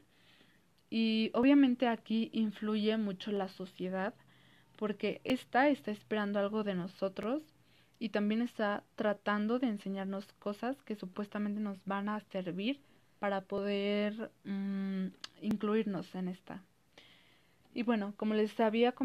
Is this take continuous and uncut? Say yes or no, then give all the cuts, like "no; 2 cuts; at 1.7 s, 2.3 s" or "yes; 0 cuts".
yes; 0 cuts